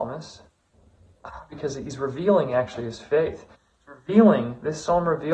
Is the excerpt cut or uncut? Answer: uncut